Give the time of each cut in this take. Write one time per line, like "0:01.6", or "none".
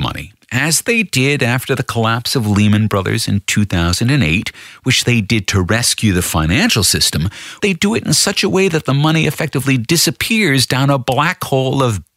0:07.6